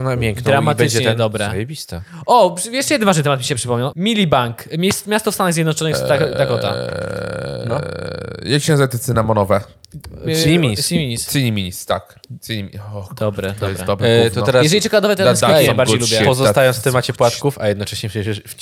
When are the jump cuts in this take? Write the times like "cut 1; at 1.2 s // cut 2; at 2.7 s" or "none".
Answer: cut 1; at 3.9 s